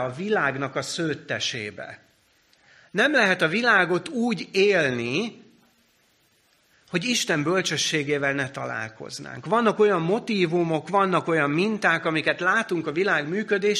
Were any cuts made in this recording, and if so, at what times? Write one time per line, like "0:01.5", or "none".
none